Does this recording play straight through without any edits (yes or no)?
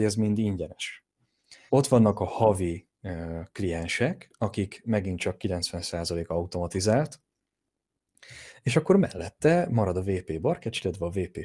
no